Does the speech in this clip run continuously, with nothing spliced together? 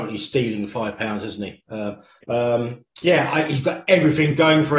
no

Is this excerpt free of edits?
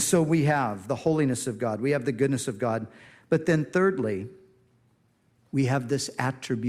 yes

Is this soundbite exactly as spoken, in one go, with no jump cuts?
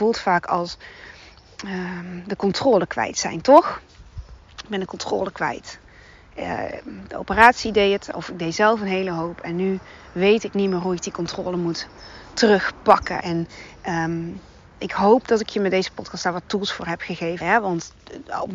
no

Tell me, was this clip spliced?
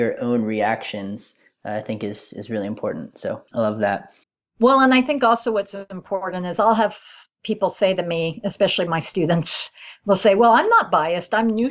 no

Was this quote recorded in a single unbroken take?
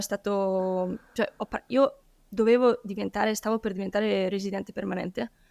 yes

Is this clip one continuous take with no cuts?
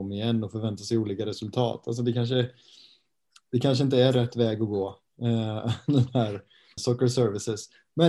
no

